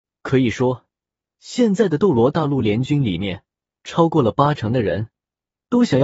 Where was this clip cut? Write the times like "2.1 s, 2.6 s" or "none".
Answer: none

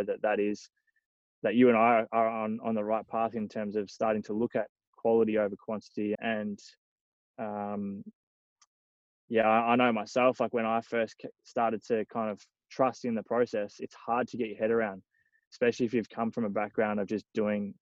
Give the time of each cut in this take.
6.2 s

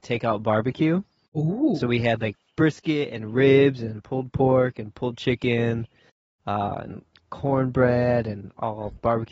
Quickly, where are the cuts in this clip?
none

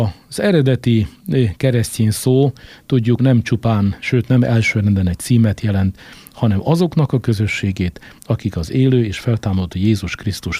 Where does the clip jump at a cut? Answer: none

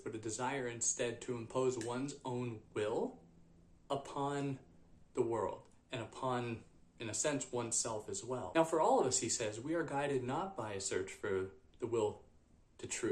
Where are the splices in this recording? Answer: none

